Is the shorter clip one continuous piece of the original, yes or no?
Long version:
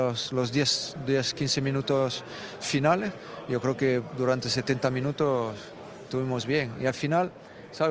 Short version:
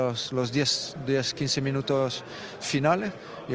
yes